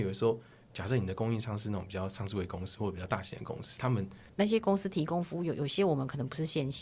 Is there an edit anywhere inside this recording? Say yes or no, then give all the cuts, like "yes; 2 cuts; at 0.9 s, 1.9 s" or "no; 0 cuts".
yes; 1 cut; at 4.3 s